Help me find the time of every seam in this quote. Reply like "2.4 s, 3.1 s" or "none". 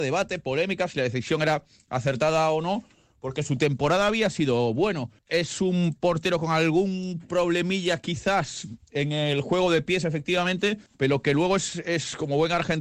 5.2 s, 10.9 s